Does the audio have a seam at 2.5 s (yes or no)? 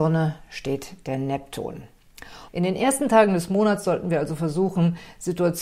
yes